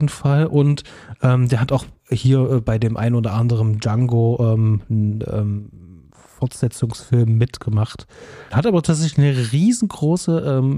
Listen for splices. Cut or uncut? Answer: cut